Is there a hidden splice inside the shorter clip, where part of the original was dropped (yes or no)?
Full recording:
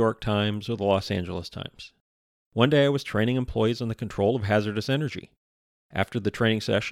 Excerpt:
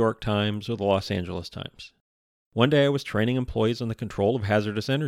no